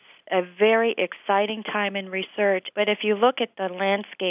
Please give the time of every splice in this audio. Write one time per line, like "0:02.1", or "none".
0:02.7